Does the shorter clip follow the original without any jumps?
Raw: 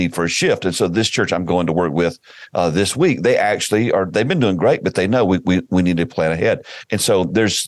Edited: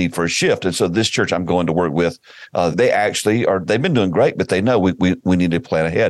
no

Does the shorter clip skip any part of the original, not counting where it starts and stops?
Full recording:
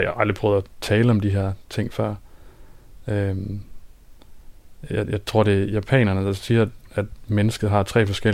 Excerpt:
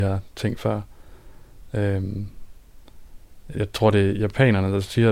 yes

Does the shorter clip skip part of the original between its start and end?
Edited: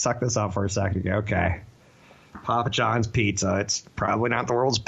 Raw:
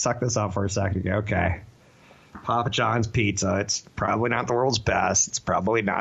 no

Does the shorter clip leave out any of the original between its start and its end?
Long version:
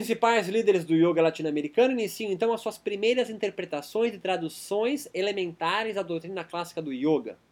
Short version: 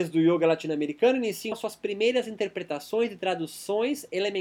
yes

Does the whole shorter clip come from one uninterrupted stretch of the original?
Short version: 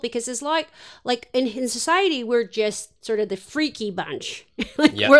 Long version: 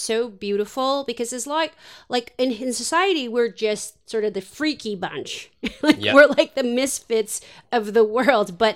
yes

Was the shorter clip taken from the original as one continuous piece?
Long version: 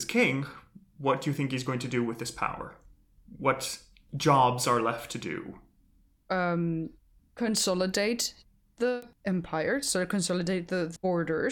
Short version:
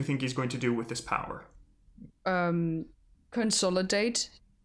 no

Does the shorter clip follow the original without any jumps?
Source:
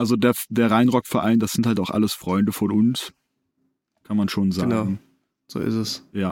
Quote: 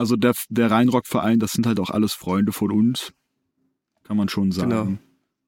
yes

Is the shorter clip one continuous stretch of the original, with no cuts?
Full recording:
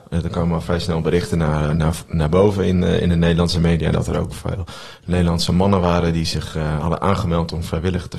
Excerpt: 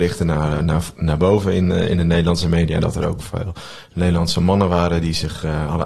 yes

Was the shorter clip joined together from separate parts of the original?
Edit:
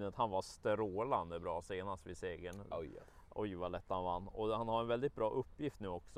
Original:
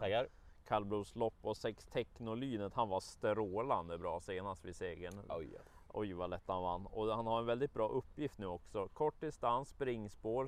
no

